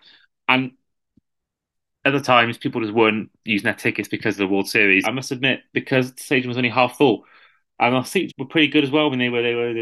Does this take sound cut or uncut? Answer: cut